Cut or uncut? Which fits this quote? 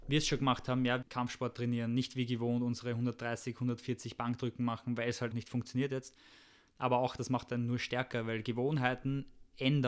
cut